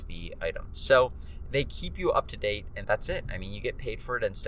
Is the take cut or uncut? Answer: cut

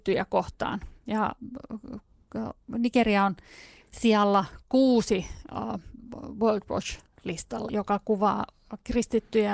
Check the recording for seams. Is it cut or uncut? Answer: cut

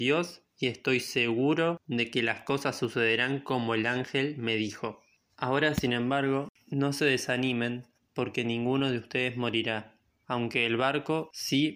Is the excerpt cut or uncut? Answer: cut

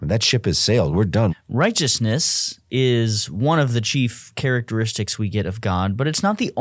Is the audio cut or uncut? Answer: cut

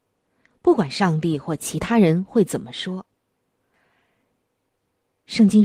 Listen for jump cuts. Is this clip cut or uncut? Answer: uncut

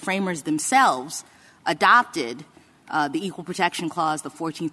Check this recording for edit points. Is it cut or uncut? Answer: uncut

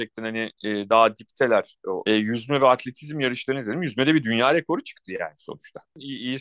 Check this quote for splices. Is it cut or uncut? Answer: cut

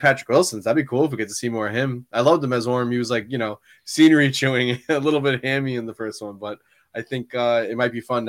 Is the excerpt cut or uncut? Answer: uncut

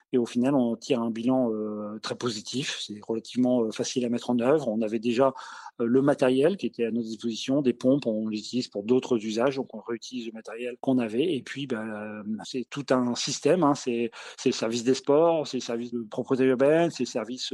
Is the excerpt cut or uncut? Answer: uncut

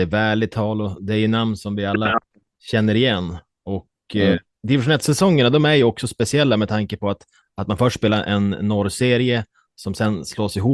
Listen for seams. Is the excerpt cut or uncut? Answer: cut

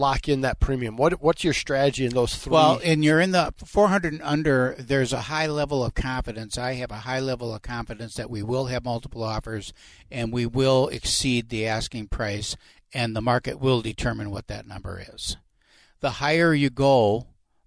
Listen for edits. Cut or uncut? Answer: uncut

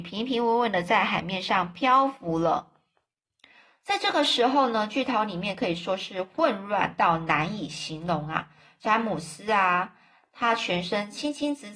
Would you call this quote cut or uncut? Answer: uncut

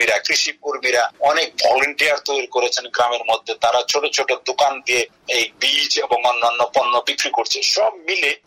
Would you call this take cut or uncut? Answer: uncut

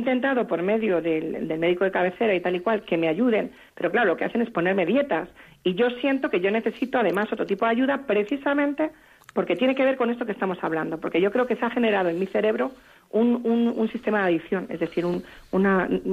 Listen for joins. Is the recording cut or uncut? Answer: cut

